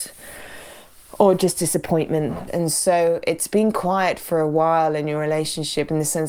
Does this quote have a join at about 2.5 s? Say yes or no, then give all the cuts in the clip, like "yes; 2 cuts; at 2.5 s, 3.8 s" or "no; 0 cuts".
yes; 1 cut; at 2.5 s